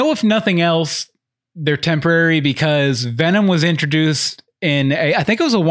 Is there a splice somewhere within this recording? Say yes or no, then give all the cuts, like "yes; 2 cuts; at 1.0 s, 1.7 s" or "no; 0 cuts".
no; 0 cuts